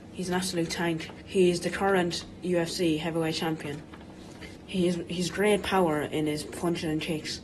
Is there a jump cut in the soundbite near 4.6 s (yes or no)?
yes